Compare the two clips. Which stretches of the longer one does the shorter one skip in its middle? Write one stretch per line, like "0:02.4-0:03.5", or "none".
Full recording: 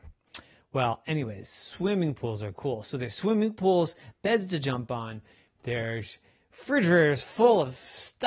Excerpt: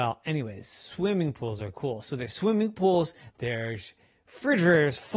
0:04.1-0:05.5